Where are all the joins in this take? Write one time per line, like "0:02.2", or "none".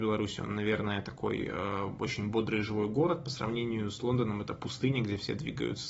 none